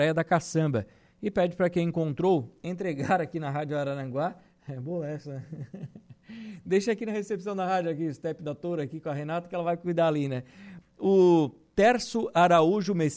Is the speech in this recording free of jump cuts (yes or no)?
no